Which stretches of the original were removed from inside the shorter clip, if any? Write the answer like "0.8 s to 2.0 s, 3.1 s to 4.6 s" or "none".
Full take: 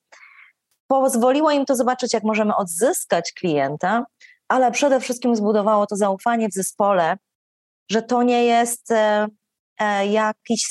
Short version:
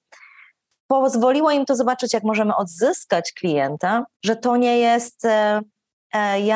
4.2 s to 7.8 s